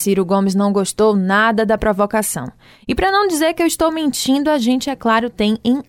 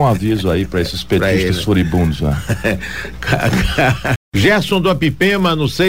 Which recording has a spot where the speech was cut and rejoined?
second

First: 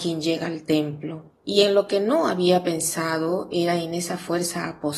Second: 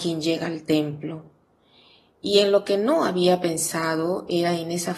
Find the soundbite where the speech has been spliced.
first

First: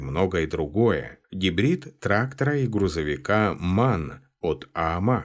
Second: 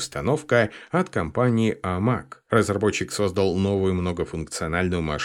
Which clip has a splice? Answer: first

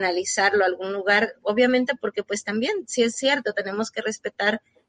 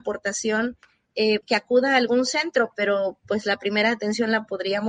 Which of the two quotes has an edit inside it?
second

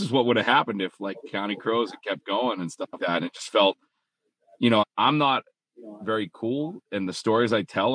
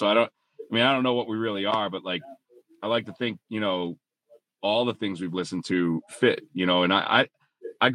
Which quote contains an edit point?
first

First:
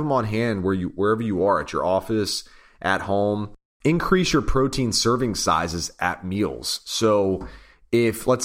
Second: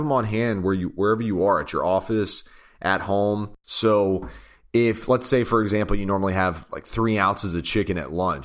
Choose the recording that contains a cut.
second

